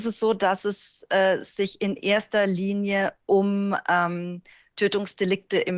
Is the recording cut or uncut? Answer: uncut